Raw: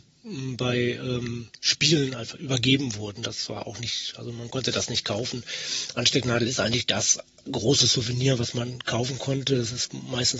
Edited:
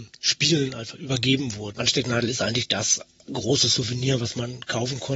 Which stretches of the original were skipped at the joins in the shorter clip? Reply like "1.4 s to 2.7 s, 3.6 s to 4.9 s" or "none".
3.2 s to 5.9 s